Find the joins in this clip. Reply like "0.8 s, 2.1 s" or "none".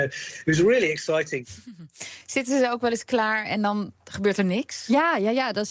none